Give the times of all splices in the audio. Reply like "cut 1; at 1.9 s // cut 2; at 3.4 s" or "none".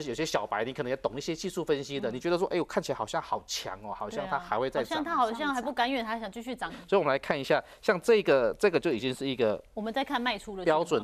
cut 1; at 6.7 s